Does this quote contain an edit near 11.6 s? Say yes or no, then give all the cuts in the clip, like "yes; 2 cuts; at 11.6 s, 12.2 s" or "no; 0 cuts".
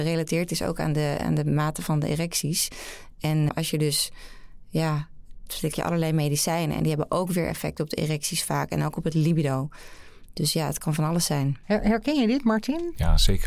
yes; 3 cuts; at 3.5 s, 5.5 s, 11.6 s